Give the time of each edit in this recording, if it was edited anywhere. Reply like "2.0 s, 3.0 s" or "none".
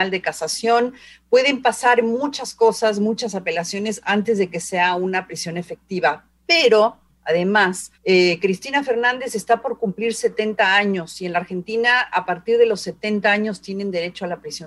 8.0 s